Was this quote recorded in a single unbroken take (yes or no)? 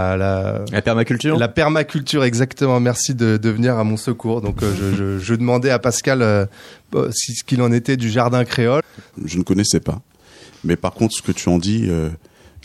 no